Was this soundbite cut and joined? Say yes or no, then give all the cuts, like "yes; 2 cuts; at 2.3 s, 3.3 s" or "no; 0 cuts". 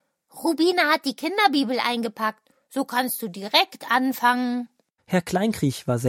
yes; 1 cut; at 5.0 s